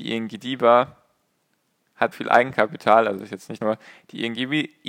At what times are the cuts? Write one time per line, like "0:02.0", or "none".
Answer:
0:02.1
0:03.6

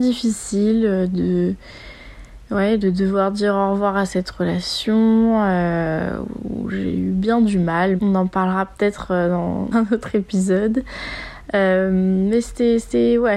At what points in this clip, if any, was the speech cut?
0:08.0
0:09.7

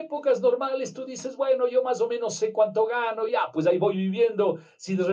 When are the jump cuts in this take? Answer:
0:03.3

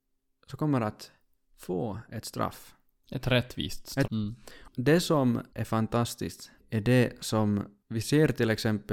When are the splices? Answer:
0:04.1
0:06.6

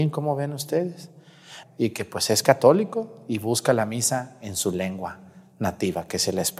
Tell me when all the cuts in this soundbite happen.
0:01.6

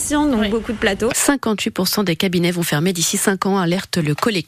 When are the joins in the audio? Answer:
0:01.1

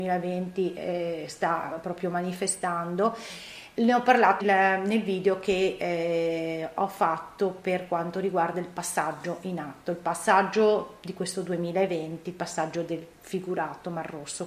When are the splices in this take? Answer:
0:04.4

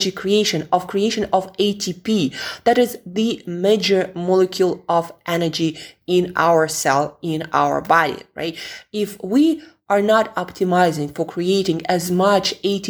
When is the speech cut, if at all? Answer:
none

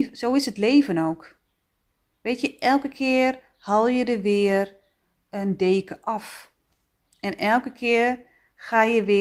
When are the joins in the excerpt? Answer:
none

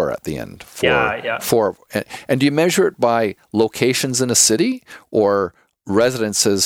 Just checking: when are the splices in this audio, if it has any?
none

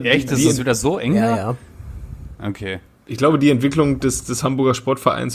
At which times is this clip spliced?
none

